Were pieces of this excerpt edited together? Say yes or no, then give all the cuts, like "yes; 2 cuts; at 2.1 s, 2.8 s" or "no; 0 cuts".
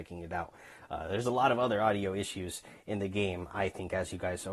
no; 0 cuts